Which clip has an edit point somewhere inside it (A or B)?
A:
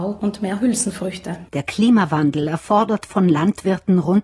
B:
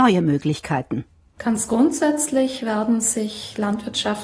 A